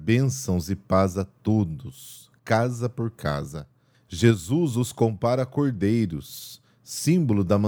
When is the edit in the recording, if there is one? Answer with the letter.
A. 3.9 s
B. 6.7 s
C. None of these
A